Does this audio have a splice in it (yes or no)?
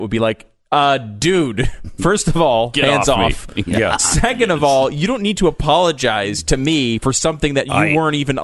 no